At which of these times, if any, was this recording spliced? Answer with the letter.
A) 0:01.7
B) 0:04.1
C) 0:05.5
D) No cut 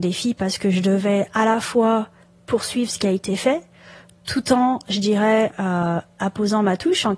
D